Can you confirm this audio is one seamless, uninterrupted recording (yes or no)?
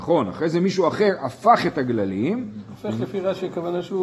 yes